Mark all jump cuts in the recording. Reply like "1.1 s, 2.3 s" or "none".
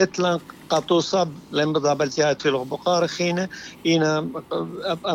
none